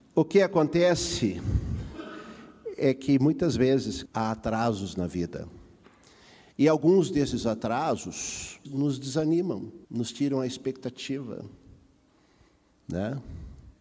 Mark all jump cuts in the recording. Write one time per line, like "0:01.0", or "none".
0:04.1
0:08.6
0:09.8